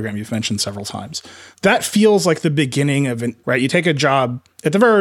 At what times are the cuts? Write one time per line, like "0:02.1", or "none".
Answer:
0:03.4

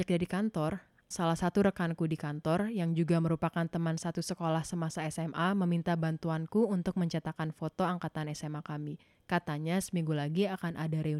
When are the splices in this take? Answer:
0:01.1

